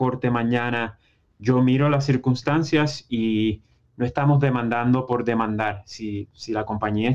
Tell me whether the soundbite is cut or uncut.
uncut